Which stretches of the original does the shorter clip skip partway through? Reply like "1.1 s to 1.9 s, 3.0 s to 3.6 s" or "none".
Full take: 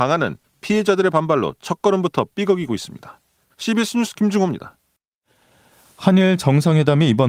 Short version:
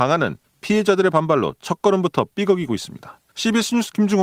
3.3 s to 3.5 s